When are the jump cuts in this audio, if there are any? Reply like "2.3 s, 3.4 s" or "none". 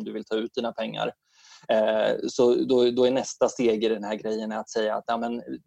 none